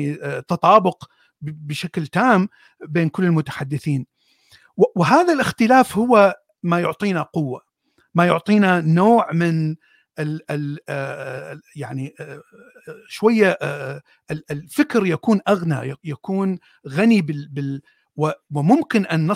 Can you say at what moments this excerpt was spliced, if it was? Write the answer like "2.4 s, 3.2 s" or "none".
none